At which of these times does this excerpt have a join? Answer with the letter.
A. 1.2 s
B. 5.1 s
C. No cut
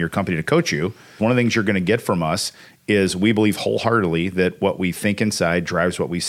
A